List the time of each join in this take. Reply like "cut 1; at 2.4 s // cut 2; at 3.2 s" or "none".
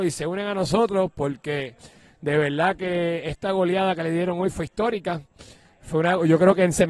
none